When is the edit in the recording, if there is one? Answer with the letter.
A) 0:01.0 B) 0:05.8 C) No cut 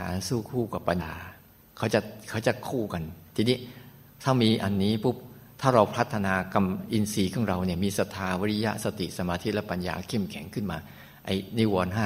A